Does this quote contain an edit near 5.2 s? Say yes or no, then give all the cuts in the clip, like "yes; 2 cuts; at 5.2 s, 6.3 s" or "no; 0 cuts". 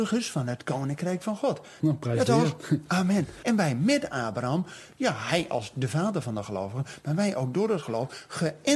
no; 2 cuts; at 1.8 s, 3.4 s